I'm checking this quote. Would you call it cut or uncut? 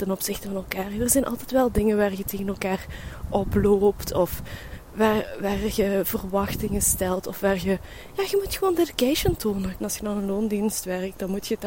cut